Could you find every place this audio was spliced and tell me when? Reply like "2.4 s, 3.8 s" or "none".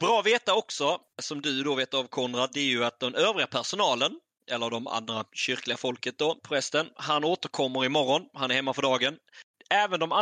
6.4 s